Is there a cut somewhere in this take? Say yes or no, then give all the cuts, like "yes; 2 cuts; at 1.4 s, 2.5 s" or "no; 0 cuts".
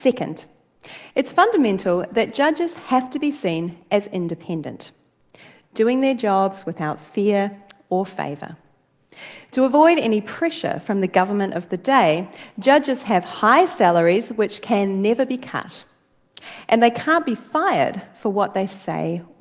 no; 0 cuts